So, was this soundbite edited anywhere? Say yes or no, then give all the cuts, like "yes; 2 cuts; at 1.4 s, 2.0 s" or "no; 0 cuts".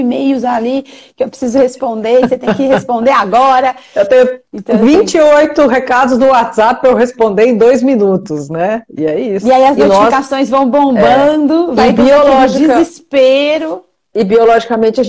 no; 0 cuts